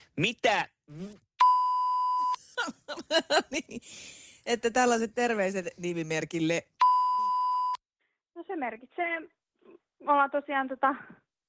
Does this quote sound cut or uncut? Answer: cut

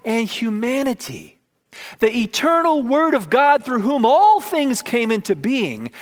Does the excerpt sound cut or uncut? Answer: uncut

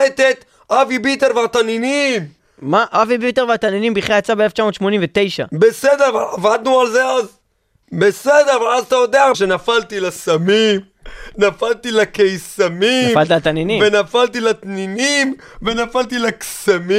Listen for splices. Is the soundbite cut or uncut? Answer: cut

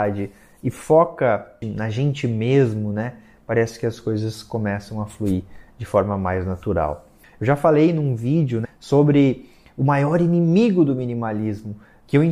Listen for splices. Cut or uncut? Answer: cut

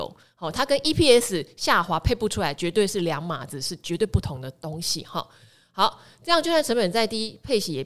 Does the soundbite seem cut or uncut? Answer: uncut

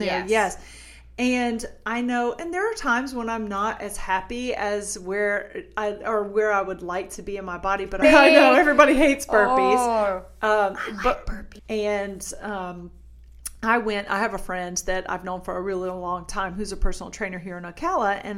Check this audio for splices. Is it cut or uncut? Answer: cut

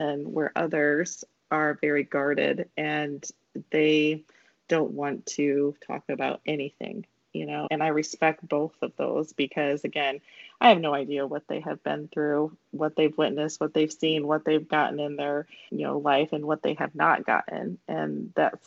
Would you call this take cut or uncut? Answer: cut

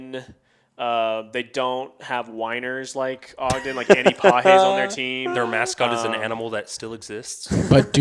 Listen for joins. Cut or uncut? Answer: uncut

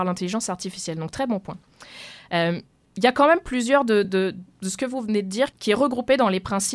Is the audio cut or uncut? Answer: uncut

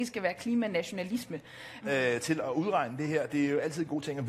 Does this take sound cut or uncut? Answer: cut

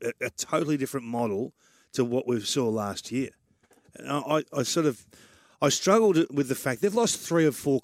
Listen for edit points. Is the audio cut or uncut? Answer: uncut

